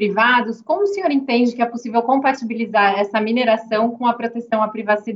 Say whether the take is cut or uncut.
uncut